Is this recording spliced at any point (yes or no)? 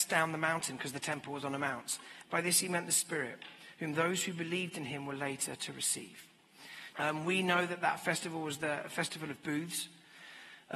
yes